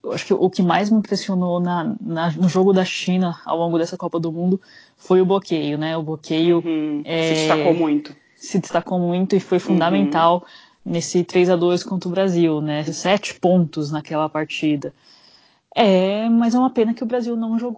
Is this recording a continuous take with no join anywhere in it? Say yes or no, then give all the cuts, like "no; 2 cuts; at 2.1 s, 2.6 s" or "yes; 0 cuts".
no; 1 cut; at 12.9 s